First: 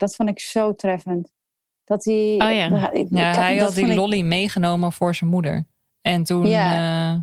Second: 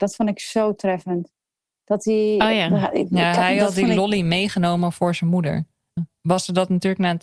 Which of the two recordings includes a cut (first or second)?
second